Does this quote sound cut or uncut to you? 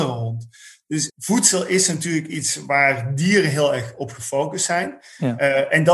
cut